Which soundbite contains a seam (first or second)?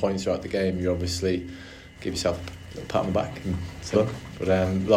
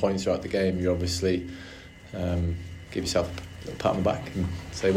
first